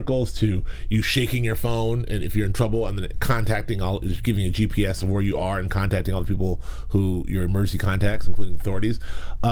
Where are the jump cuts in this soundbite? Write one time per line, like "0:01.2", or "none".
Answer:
none